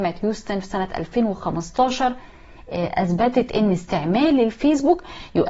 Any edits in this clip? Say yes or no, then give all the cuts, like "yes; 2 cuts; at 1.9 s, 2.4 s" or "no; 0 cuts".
no; 0 cuts